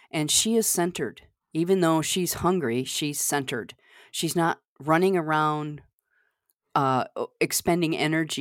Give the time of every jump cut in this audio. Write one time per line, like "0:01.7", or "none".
none